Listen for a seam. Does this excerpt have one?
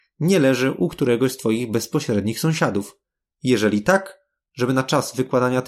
yes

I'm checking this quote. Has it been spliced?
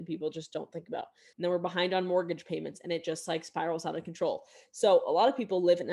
yes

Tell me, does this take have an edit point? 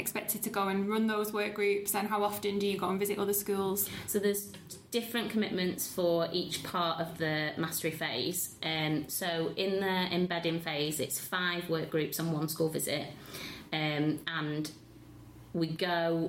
no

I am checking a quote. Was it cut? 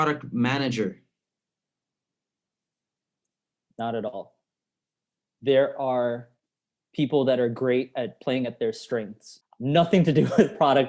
yes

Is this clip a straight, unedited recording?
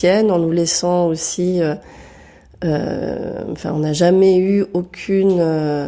yes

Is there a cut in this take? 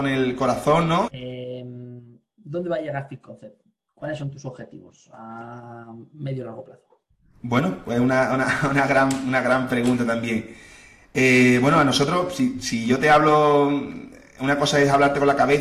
yes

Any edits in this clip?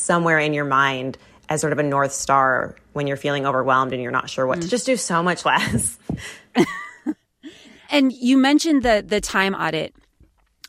yes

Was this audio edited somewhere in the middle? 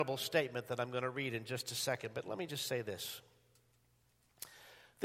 no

